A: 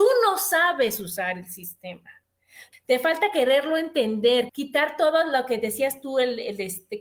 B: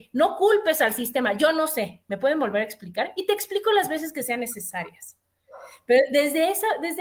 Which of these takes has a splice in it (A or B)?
A